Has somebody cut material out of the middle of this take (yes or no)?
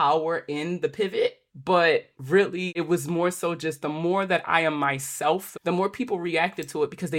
yes